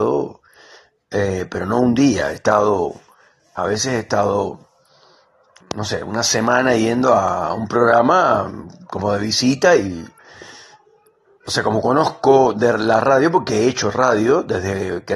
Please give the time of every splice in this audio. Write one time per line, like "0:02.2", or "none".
0:05.6